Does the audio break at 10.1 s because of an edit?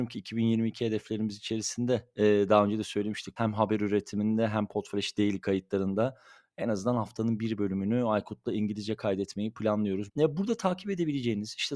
yes; 2 cuts; at 3.4 s, 10.1 s

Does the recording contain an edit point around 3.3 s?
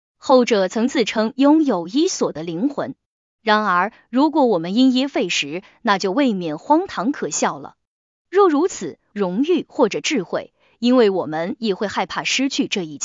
no; 1 cut; at 9.1 s

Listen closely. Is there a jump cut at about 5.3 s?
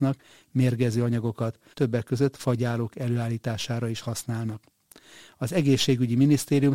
no; 1 cut; at 1.7 s

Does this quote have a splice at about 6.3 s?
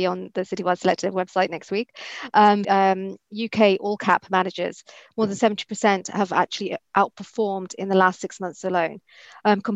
no; 1 cut; at 2.6 s

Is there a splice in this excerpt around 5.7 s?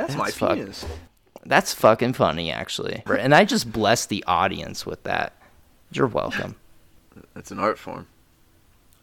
no; 1 cut; at 3.1 s

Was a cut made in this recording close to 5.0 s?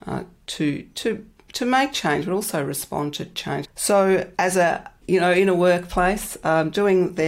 yes; 2 cuts; at 3.6 s, 5.0 s

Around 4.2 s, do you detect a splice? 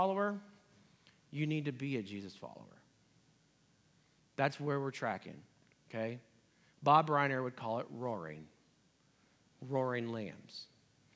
yes; 1 cut; at 4.2 s

